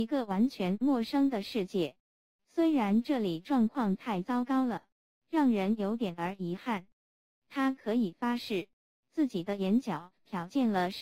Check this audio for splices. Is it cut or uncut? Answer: cut